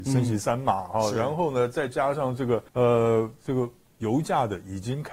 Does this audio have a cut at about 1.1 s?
no; 1 cut; at 2.7 s

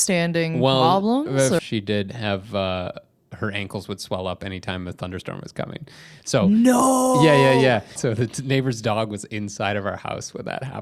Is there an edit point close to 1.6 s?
yes; 2 cuts; at 1.6 s, 8.0 s

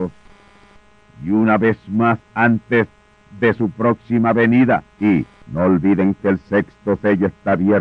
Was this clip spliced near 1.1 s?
no; 1 cut; at 5.0 s

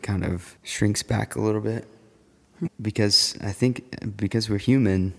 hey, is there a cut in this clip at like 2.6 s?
yes; 1 cut; at 2.6 s

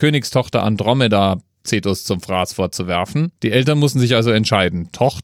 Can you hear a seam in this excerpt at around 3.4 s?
yes; 1 cut; at 3.4 s

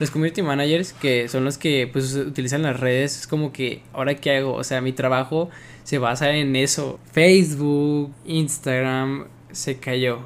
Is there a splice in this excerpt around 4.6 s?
no; 2 cuts; at 7.0 s, 8.1 s

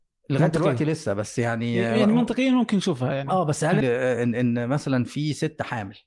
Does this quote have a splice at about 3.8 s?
yes; 1 cut; at 3.8 s

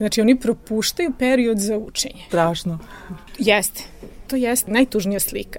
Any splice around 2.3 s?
yes; 1 cut; at 2.3 s

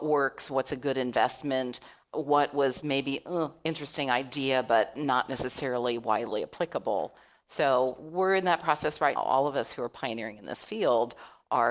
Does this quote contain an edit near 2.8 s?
no; 1 cut; at 9.2 s

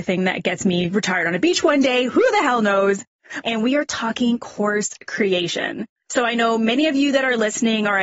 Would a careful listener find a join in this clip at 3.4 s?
yes; 1 cut; at 3.4 s

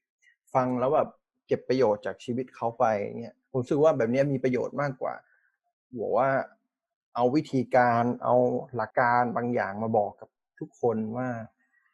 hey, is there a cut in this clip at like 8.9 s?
yes; 1 cut; at 8.9 s

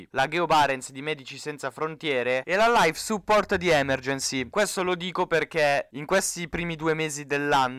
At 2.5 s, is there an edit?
no; 1 cut; at 4.5 s

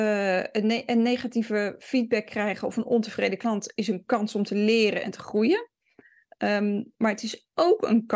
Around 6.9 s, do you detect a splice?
no; 0 cuts

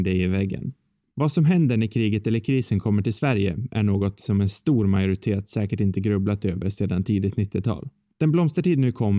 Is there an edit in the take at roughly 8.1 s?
yes; 2 cuts; at 1.1 s, 8.1 s

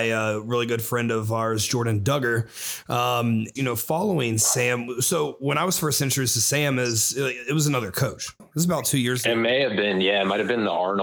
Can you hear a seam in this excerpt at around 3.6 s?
yes; 2 cuts; at 3.6 s, 8.4 s

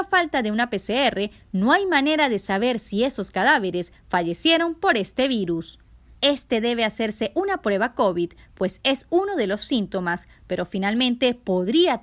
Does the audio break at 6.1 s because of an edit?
yes; 1 cut; at 6.1 s

